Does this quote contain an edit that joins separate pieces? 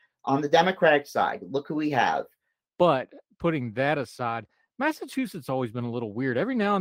yes; 1 cut; at 2.7 s

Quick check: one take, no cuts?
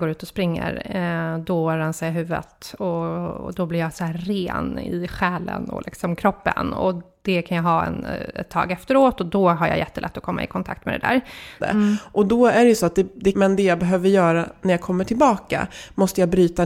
no; 2 cuts; at 11.6 s, 13.3 s

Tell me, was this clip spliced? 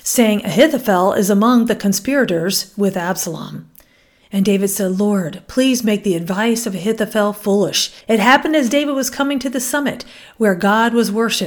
yes; 1 cut; at 8.0 s

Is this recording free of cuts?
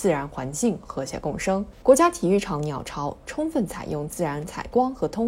no; 1 cut; at 1.8 s

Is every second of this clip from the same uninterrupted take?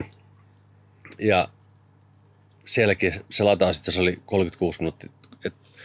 yes; 0 cuts

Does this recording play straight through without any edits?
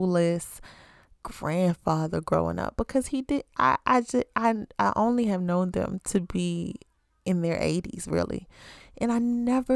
yes; 0 cuts

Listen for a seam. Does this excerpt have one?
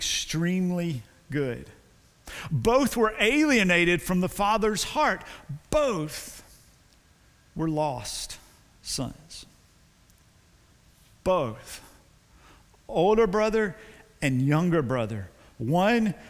no; 0 cuts

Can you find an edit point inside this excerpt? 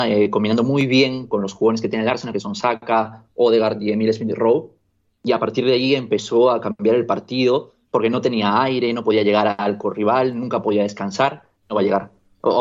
yes; 2 cuts; at 7.8 s, 11.6 s

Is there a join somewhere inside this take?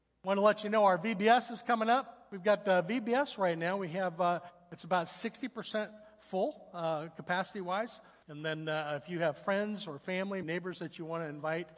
yes; 2 cuts; at 8.2 s, 10.4 s

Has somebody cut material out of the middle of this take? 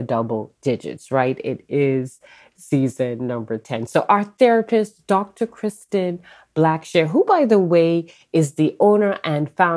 no; 0 cuts

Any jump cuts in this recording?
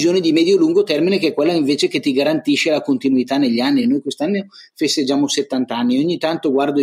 no; 0 cuts

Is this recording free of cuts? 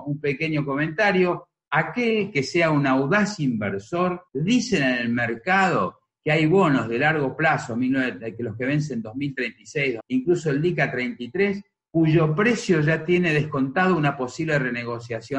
no; 3 cuts; at 1.7 s, 4.3 s, 10.0 s

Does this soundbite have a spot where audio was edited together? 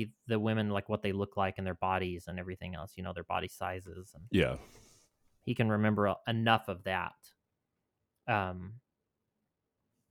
no; 0 cuts

